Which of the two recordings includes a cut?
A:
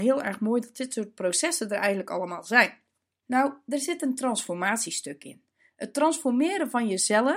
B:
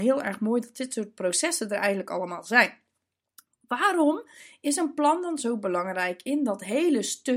A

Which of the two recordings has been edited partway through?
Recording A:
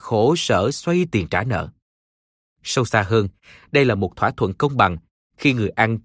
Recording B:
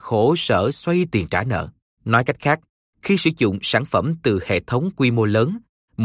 B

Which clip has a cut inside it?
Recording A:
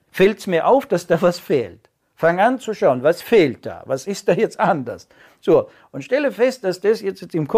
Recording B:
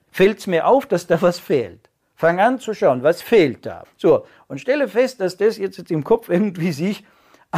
B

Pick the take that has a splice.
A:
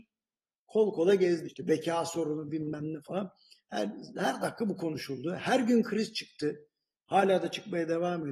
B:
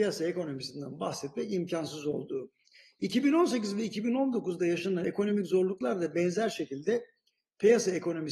A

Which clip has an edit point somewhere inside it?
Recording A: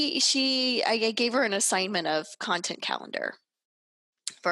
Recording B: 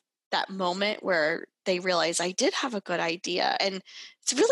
B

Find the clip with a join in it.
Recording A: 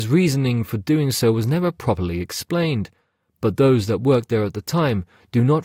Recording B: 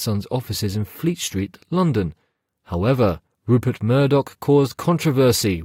B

